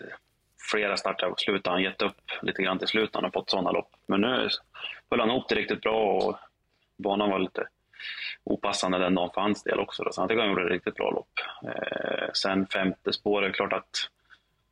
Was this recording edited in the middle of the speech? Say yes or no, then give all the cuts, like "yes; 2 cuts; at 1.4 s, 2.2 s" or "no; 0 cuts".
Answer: no; 0 cuts